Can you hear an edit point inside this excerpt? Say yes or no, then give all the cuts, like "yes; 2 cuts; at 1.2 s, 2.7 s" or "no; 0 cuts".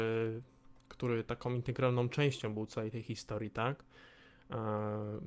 no; 0 cuts